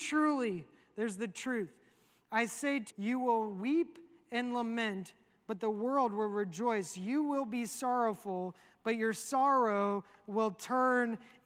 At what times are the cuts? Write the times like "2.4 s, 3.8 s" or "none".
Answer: 2.9 s